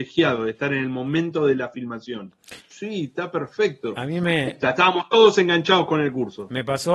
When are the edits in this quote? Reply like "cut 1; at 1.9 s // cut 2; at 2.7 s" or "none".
cut 1; at 2.6 s

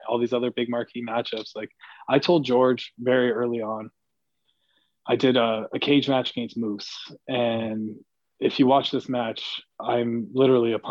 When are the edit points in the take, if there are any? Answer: none

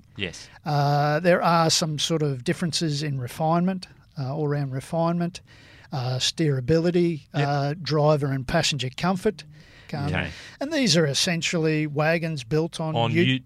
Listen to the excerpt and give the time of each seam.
cut 1; at 9.9 s

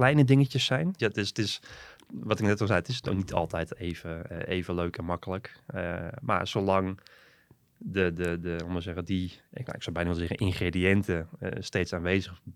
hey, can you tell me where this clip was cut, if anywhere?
cut 1; at 1.0 s

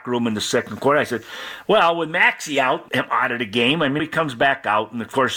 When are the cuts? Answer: cut 1; at 2.9 s // cut 2; at 4.0 s

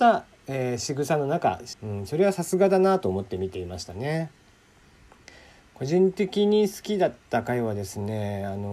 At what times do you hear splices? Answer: cut 1; at 1.7 s

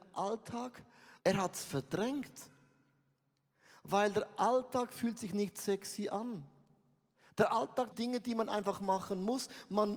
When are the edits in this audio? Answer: cut 1; at 1.2 s // cut 2; at 7.9 s

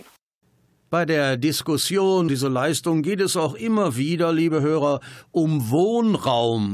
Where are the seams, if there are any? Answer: cut 1; at 2.3 s

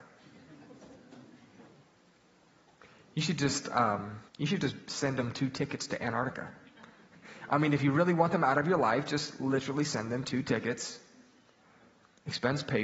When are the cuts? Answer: cut 1; at 4.3 s

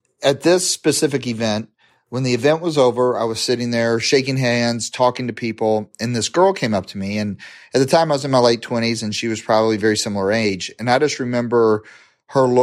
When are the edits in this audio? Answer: none

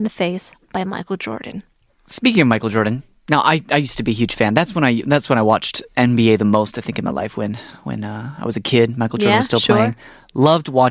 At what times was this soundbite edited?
none

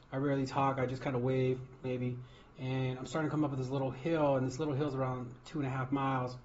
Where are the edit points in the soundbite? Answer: cut 1; at 1.8 s

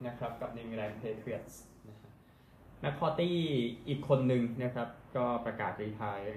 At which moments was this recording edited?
none

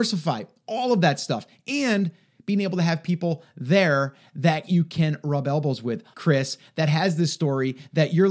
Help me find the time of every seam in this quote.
cut 1; at 6.1 s

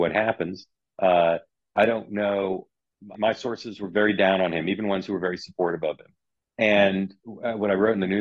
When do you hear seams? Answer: cut 1; at 3.1 s

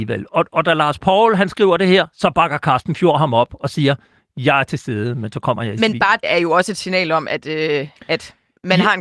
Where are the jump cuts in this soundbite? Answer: cut 1; at 6.2 s

